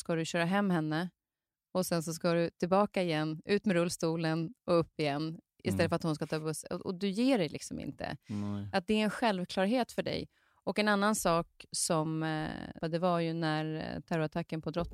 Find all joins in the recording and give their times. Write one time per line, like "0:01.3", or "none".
0:12.8